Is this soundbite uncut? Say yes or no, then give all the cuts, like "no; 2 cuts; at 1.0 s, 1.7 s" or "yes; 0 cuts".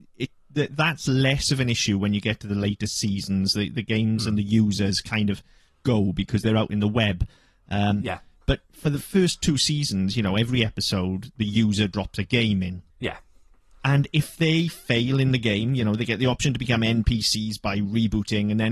no; 1 cut; at 12.9 s